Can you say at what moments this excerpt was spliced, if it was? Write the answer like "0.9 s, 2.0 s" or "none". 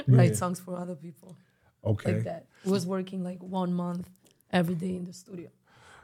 none